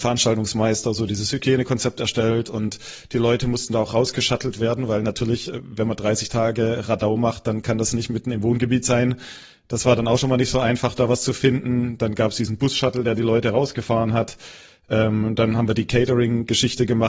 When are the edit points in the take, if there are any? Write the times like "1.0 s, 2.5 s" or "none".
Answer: none